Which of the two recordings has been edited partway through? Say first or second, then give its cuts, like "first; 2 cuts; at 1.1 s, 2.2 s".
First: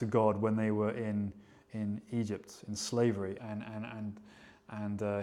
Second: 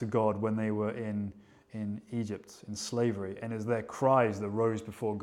first; 1 cut; at 3.4 s